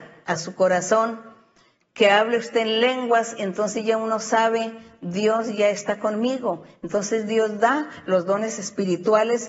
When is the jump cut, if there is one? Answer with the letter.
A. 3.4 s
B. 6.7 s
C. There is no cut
C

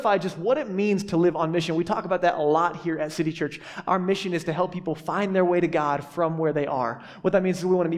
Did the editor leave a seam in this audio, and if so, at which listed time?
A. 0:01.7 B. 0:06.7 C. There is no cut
C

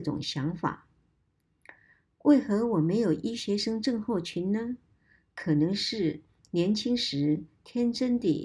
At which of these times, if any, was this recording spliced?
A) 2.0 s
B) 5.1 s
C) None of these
C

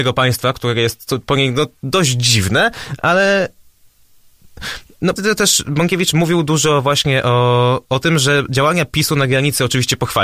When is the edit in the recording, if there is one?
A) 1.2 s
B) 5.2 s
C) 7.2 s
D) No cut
B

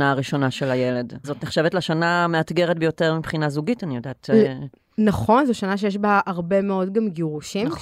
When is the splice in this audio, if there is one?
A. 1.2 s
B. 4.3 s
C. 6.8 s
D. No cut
A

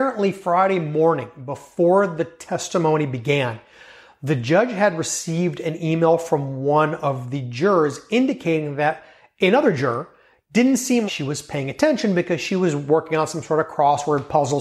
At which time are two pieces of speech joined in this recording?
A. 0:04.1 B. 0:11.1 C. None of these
B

